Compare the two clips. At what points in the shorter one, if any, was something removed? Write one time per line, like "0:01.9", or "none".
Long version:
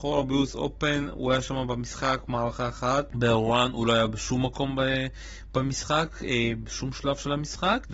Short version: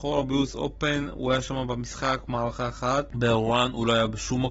none